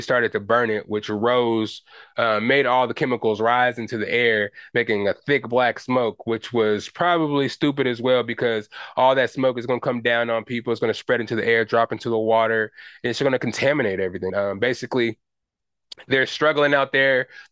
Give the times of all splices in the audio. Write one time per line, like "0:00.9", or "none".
0:14.3